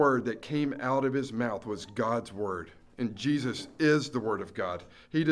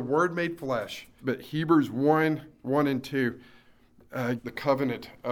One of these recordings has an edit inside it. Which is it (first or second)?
second